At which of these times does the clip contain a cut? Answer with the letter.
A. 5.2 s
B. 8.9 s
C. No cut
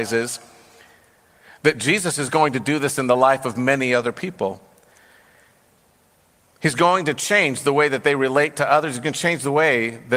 C